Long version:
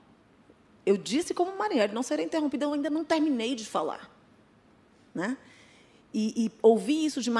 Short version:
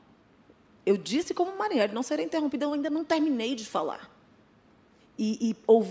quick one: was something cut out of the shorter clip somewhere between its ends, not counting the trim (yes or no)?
yes